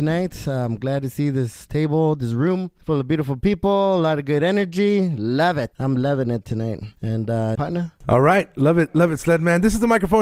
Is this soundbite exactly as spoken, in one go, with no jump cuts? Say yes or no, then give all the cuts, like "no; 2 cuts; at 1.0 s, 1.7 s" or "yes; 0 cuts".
no; 1 cut; at 7.5 s